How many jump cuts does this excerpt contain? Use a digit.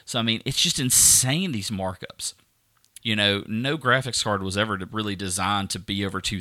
1